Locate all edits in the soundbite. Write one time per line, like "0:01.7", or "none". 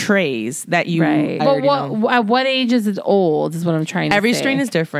0:01.4